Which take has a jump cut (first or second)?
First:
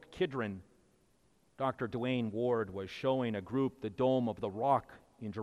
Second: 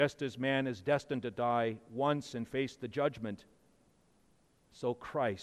first